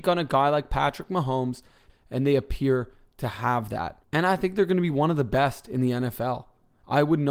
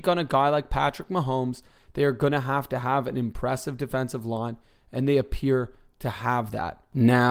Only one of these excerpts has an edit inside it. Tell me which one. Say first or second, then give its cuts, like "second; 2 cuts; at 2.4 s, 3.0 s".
first; 2 cuts; at 1.9 s, 4.0 s